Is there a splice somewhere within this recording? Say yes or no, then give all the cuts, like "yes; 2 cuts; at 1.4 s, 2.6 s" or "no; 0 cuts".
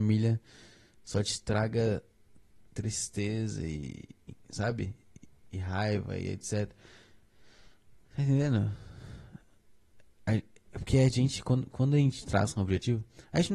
no; 0 cuts